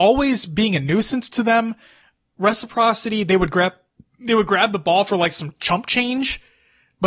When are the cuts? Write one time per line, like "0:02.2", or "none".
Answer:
none

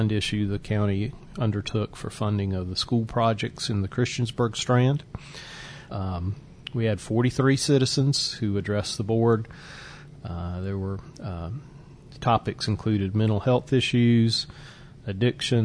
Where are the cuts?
0:05.9

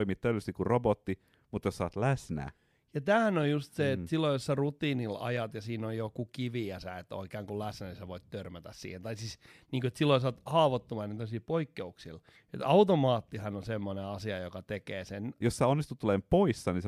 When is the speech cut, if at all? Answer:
0:12.4
0:15.4

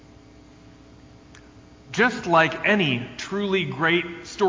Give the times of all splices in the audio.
0:01.8

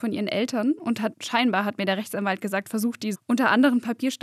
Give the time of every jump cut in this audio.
0:01.1
0:03.1

